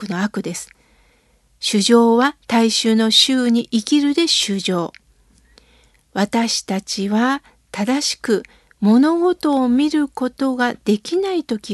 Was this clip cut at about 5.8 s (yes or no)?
no